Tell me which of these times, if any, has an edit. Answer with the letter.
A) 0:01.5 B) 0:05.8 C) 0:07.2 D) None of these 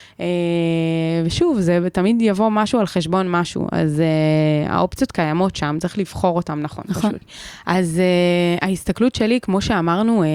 C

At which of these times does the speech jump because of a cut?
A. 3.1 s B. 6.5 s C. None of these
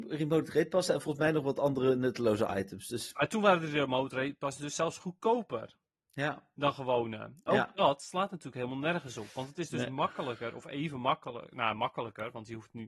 C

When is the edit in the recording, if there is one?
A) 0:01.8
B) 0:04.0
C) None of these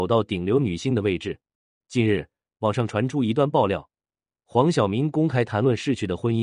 A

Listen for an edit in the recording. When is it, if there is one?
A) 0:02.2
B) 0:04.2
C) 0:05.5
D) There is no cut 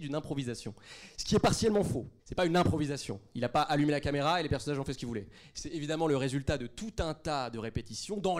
A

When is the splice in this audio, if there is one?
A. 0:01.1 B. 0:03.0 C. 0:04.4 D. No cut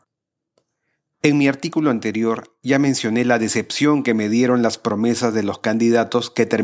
A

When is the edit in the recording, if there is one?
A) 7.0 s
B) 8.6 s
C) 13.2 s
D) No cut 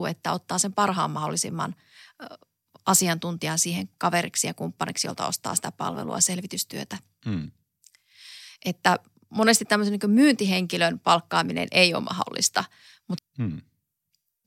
C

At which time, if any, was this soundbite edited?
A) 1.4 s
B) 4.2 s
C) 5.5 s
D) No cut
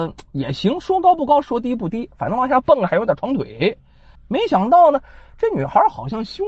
B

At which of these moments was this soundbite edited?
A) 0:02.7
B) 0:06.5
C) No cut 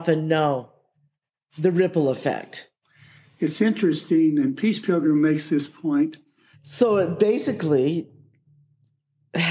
B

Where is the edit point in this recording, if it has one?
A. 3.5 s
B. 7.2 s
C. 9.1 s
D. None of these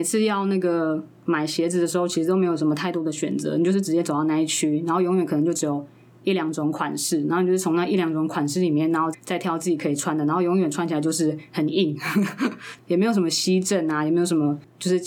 C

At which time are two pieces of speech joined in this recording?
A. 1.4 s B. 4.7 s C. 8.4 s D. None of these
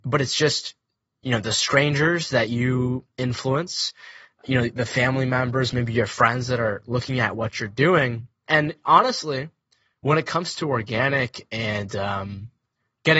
C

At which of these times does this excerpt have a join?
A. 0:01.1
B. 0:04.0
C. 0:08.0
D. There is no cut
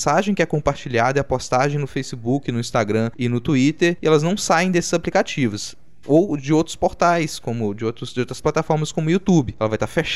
D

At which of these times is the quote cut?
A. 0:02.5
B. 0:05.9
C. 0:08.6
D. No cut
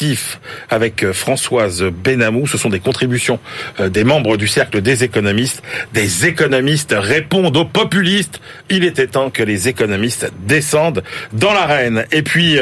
D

